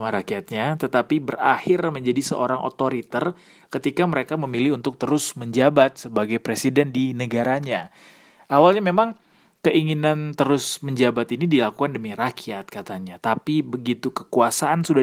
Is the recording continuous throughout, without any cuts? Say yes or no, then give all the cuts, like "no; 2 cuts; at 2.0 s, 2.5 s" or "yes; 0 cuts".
yes; 0 cuts